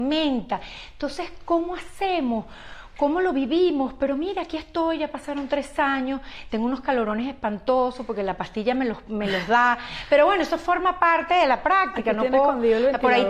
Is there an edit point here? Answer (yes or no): no